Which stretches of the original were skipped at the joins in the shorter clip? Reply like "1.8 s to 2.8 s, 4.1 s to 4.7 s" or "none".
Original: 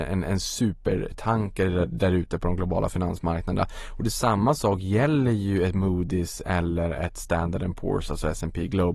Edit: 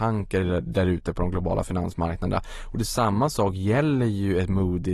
none